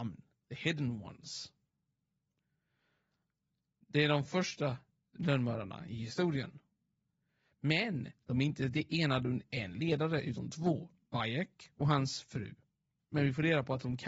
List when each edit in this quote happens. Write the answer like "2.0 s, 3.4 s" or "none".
13.0 s